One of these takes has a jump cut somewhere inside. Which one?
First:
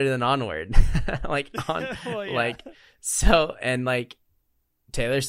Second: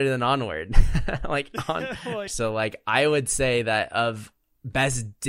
second; 1 cut; at 2.3 s

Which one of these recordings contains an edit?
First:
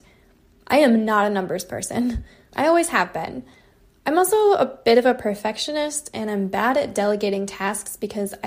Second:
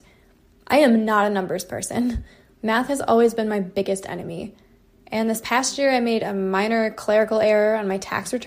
first; 1 cut; at 2.5 s

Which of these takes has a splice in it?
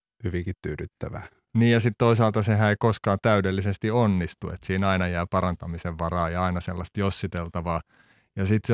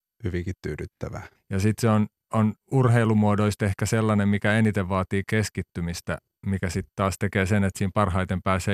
second; 2 cuts; at 1.4 s, 2.6 s

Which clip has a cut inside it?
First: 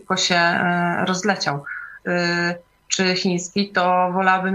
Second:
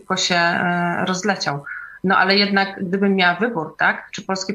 first; 1 cut; at 2.0 s

